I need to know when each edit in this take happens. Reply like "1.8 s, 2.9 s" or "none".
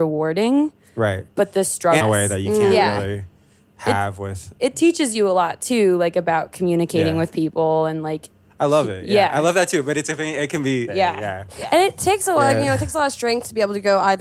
2.0 s, 10.9 s